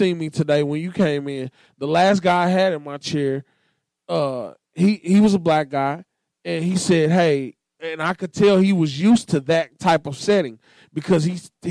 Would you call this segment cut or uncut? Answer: uncut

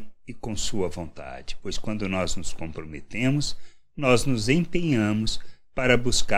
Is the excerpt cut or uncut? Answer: uncut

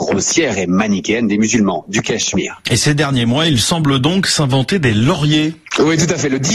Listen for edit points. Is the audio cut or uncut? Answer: uncut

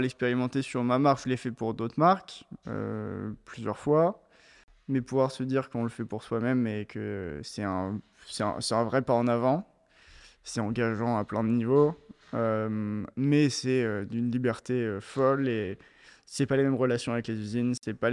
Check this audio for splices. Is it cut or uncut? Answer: uncut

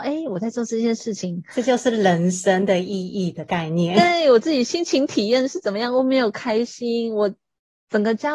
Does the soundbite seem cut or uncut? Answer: uncut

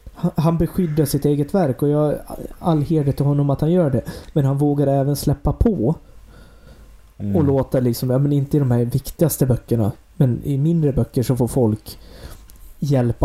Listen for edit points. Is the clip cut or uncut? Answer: uncut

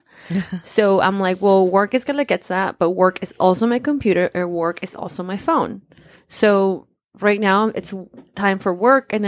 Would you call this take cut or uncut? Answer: uncut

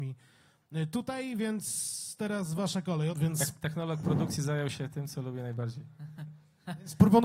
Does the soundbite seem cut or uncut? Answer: cut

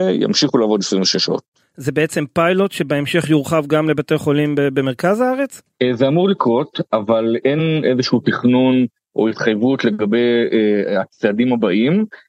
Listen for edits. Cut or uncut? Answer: uncut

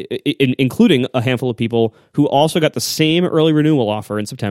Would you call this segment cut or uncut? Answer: uncut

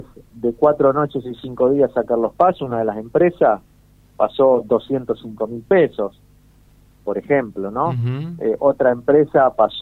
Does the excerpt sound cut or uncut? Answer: uncut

